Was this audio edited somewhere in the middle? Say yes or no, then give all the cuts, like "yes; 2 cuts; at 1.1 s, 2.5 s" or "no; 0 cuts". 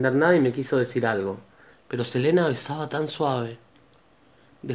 yes; 1 cut; at 1.7 s